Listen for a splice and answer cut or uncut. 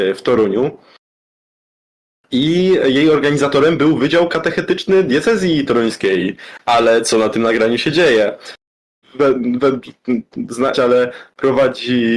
cut